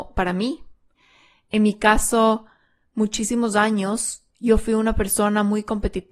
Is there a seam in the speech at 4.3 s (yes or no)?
yes